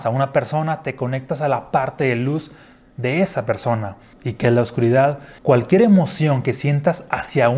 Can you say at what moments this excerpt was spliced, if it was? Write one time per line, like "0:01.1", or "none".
0:04.1
0:05.4